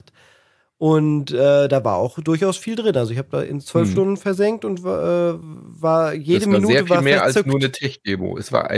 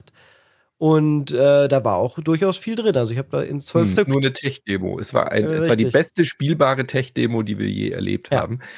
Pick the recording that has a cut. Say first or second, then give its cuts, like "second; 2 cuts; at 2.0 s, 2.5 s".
second; 1 cut; at 4.0 s